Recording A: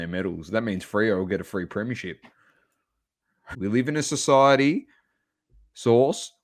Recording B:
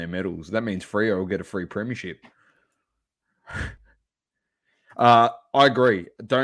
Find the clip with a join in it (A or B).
A